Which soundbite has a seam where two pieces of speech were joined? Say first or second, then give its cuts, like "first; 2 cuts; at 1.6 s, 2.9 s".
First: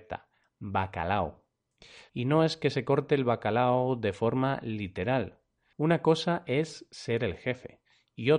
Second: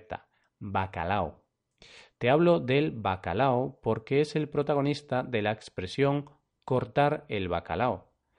first; 2 cuts; at 2.1 s, 5.7 s